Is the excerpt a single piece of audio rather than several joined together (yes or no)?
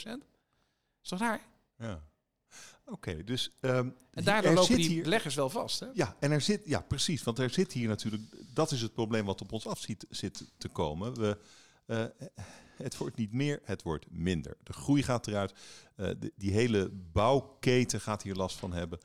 yes